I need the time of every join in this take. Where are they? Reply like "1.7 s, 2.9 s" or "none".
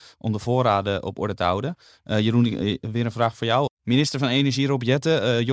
none